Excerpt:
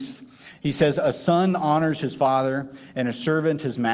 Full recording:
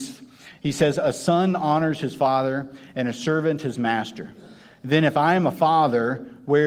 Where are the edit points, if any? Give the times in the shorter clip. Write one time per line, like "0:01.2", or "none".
none